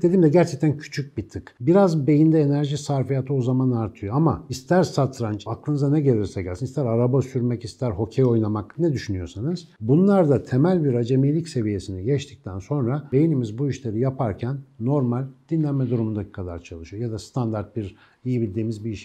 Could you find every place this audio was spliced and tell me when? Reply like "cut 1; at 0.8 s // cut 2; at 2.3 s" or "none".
cut 1; at 5.5 s